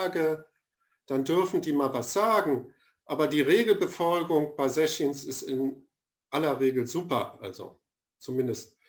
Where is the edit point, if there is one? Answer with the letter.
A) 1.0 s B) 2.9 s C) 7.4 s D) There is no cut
D